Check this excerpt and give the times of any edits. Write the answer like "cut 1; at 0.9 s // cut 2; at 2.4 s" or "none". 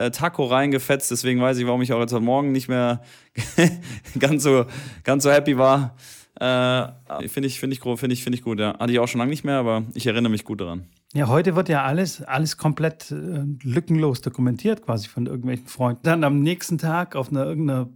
cut 1; at 7.2 s // cut 2; at 16.0 s